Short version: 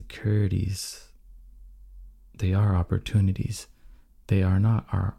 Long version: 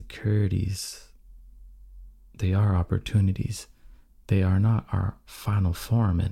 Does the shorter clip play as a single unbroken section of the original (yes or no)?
yes